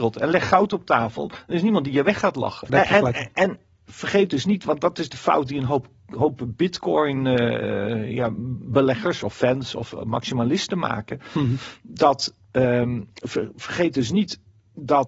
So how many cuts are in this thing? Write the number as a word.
one